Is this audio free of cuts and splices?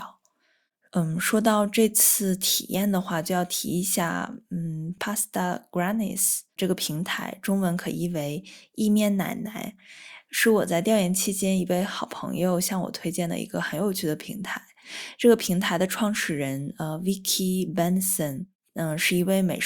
yes; 0 cuts

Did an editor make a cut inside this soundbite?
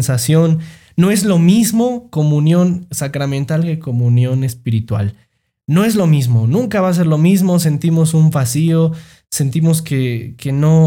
no; 0 cuts

